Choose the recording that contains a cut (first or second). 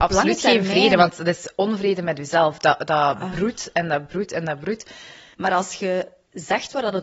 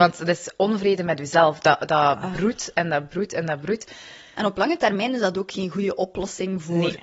first